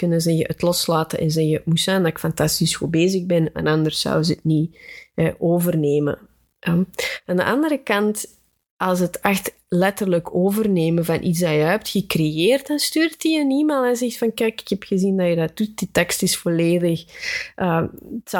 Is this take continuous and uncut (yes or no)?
yes